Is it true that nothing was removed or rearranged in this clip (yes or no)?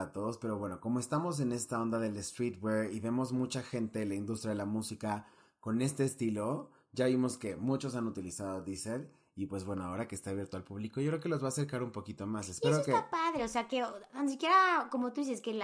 yes